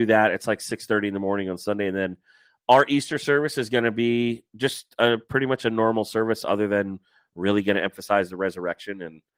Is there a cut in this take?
no; 0 cuts

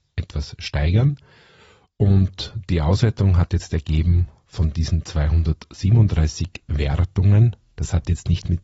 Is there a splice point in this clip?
no; 0 cuts

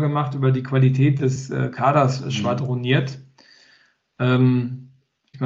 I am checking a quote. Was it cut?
no; 0 cuts

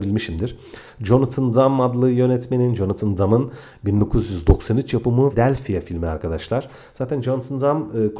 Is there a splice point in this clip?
yes; 1 cut; at 5.3 s

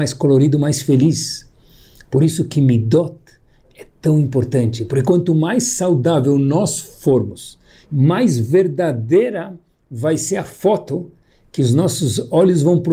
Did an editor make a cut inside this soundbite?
yes; 1 cut; at 7.8 s

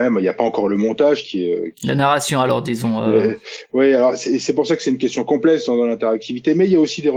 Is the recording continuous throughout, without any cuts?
yes; 0 cuts

